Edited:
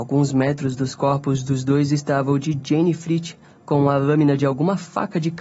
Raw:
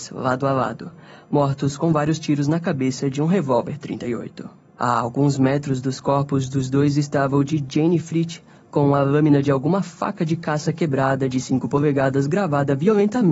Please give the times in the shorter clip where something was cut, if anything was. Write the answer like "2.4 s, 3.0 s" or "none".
none